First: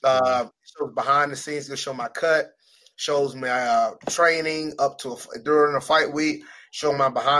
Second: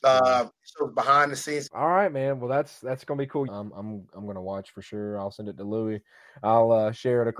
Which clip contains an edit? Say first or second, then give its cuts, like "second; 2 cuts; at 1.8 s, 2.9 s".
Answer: second; 2 cuts; at 1.7 s, 3.5 s